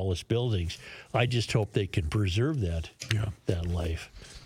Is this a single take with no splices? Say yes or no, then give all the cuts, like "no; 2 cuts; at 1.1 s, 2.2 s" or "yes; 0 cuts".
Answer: yes; 0 cuts